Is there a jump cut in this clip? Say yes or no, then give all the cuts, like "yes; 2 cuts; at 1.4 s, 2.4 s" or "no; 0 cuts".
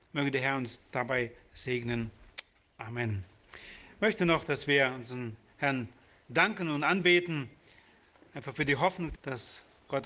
yes; 1 cut; at 9.1 s